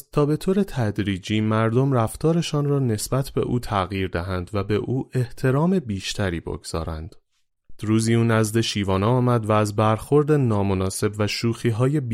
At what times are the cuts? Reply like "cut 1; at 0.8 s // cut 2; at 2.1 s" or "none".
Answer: cut 1; at 7.8 s